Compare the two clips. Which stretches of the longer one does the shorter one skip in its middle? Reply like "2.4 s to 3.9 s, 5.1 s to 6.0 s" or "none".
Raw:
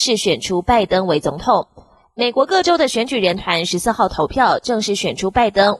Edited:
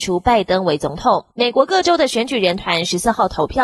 1.7 s to 2.1 s